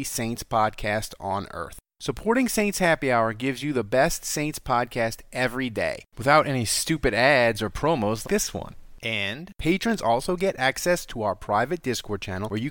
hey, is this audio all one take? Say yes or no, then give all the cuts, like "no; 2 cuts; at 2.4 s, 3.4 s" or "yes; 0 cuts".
no; 1 cut; at 8.2 s